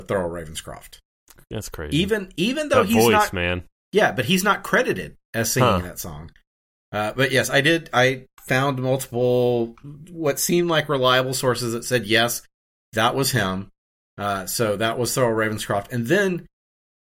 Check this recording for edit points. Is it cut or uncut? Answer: uncut